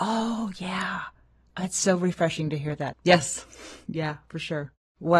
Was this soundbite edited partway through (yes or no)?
yes